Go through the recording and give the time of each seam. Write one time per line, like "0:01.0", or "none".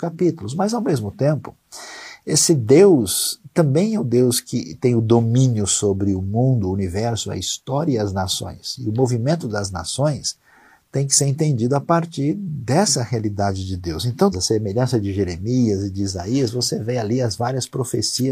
0:14.3